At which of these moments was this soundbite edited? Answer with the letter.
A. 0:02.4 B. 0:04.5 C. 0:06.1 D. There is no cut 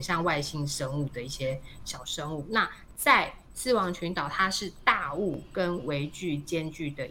D